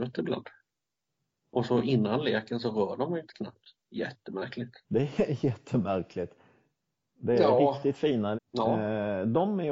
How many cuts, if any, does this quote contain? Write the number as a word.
two